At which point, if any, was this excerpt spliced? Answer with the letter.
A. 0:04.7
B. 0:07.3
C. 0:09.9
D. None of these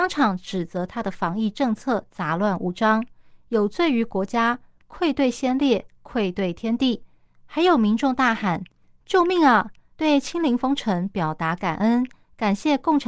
C